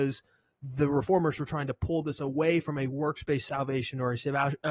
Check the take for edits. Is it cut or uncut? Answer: uncut